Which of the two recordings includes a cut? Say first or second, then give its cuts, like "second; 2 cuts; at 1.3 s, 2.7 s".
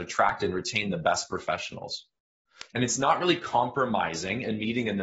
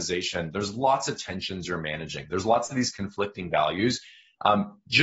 first; 1 cut; at 2.7 s